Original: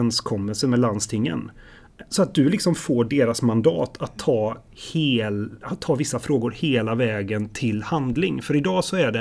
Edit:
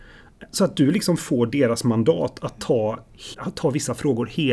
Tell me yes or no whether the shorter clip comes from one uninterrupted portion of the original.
no